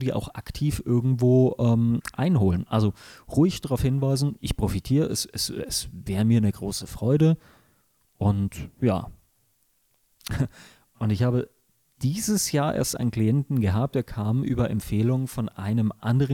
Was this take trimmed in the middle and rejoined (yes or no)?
no